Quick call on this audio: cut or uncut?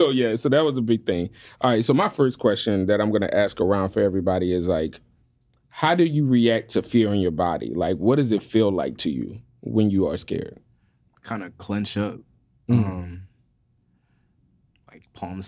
uncut